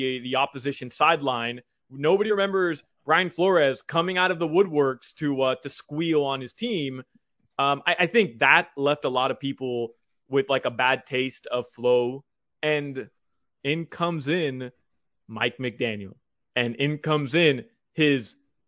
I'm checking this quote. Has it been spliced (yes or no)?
no